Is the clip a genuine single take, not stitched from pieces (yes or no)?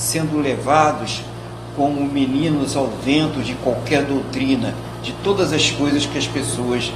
yes